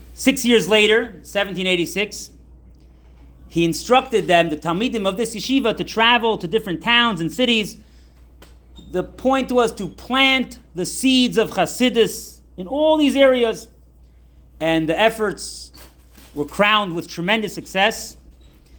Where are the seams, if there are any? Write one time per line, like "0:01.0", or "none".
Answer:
none